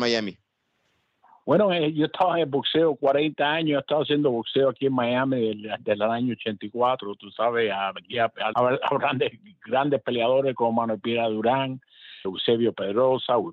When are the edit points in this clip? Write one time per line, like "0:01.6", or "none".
0:08.5
0:12.2